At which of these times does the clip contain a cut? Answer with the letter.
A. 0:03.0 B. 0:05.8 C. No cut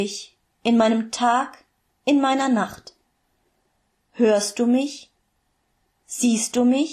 C